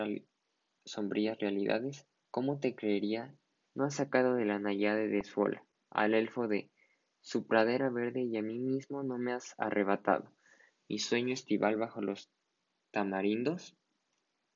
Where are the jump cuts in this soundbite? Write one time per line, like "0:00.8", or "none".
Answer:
0:02.2
0:03.7